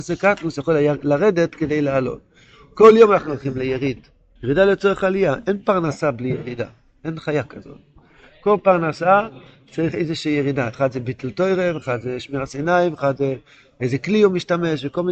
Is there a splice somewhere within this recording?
yes; 1 cut; at 4.4 s

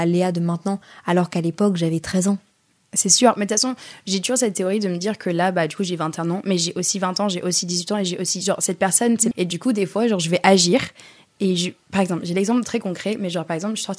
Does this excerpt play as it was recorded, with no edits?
no; 1 cut; at 9.3 s

